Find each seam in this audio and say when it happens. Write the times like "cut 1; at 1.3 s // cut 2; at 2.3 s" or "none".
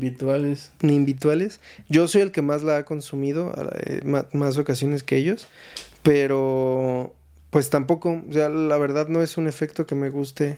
none

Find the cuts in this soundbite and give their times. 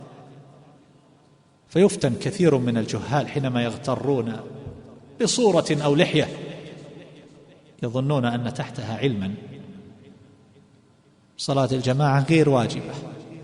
none

